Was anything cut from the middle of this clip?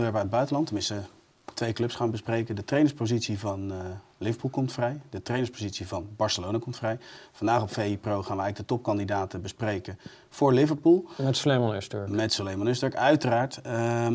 no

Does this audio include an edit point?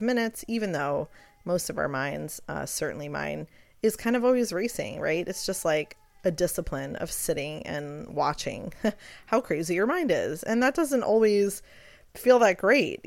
no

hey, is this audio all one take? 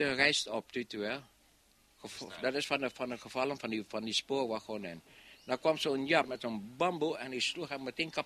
yes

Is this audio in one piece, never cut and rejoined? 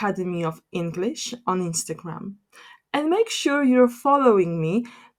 yes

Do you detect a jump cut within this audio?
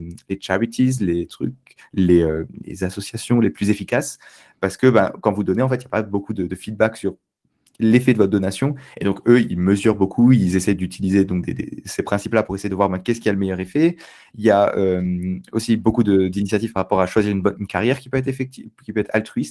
no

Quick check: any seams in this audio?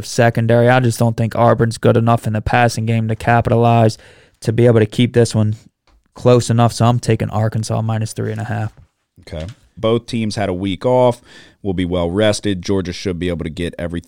yes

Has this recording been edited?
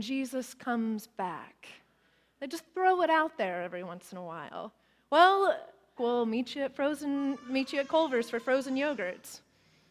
yes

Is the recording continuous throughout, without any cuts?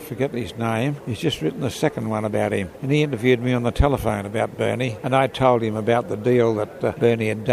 yes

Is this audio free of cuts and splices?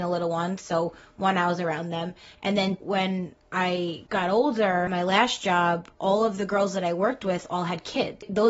no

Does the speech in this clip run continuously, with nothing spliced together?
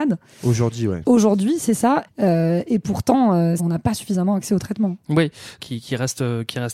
no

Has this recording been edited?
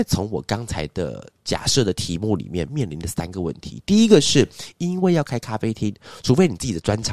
no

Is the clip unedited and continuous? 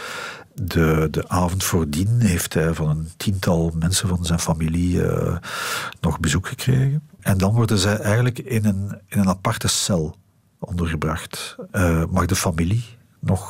no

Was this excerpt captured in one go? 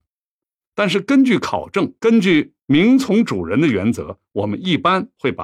no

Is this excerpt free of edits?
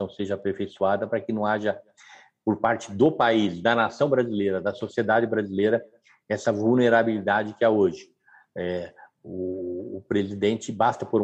yes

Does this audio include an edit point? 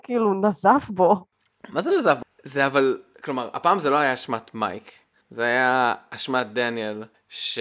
yes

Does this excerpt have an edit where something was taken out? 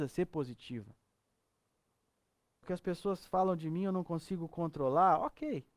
yes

